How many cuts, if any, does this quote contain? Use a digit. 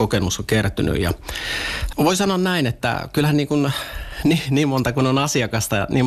1